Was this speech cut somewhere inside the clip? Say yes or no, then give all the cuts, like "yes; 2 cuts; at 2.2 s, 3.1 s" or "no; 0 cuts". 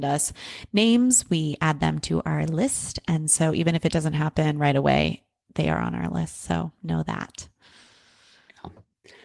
no; 0 cuts